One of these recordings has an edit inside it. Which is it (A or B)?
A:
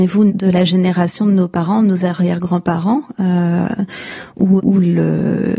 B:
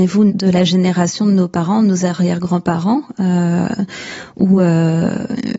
A